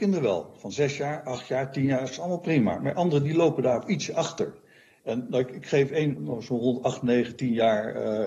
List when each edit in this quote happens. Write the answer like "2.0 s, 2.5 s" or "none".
5.0 s, 6.2 s